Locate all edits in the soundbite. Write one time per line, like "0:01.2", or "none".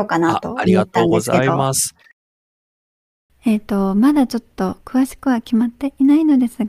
0:03.3